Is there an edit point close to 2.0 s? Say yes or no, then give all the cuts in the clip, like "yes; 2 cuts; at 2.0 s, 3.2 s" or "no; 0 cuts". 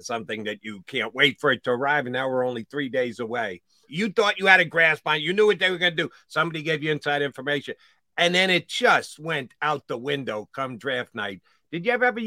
no; 1 cut; at 3.9 s